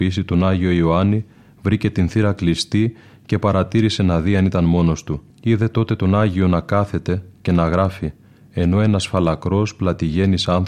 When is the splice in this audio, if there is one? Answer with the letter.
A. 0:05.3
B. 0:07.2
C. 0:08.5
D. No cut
A